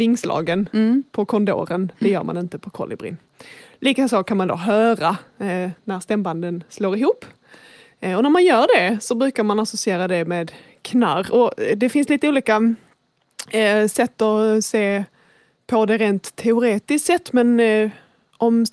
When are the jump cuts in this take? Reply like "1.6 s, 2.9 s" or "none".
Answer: none